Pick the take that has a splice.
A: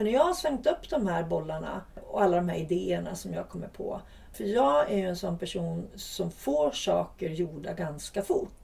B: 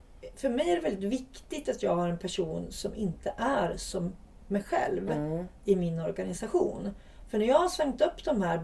A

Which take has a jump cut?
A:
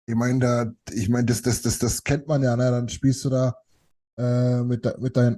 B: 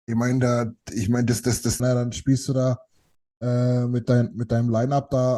B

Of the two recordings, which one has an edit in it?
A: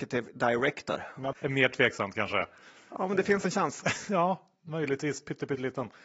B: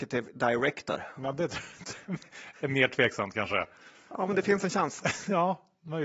A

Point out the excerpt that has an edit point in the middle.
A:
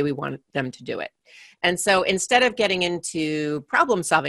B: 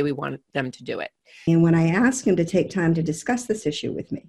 B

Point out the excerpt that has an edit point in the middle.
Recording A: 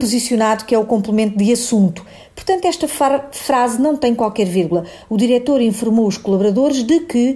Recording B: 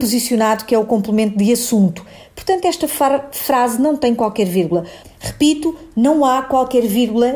B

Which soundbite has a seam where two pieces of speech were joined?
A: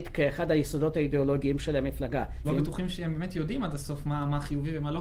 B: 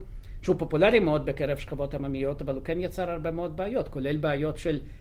A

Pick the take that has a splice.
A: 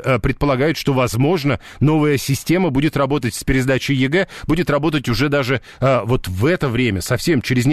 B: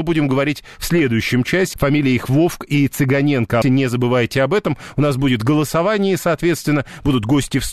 B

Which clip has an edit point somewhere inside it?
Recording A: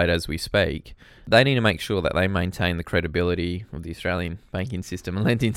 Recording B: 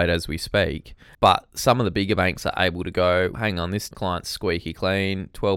B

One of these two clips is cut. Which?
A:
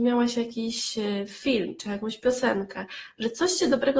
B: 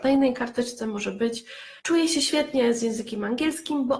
B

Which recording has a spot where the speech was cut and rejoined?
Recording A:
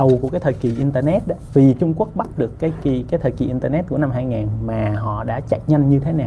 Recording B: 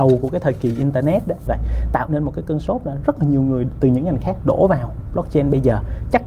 B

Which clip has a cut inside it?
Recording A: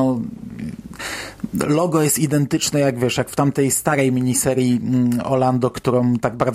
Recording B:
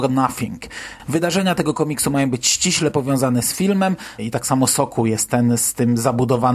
B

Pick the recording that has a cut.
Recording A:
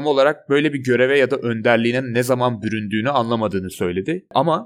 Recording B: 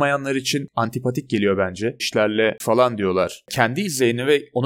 B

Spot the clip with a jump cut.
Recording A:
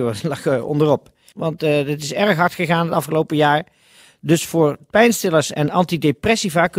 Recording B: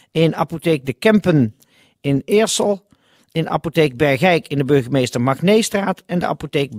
A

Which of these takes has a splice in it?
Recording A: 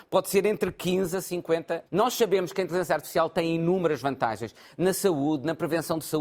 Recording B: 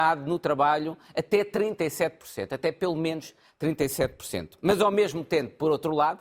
A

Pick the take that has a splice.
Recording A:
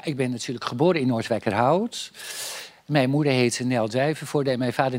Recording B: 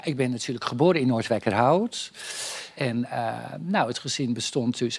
B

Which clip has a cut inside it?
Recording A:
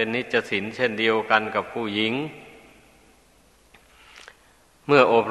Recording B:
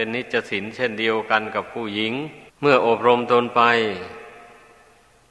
B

